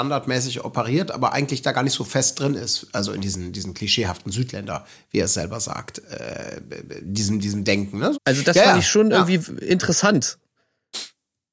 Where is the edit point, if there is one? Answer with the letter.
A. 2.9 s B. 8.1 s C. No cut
B